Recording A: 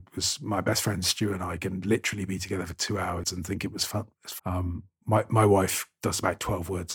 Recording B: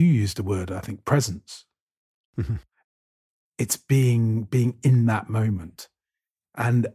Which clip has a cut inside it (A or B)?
A